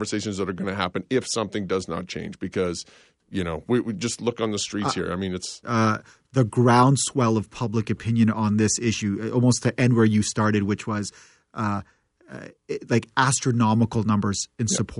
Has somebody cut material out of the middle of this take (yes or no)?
yes